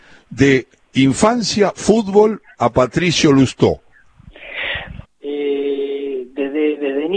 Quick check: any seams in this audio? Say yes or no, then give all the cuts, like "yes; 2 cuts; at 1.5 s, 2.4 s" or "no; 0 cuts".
yes; 1 cut; at 5.0 s